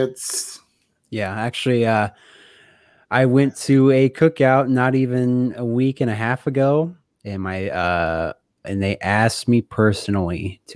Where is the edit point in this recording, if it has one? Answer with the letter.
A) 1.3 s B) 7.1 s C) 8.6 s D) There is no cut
C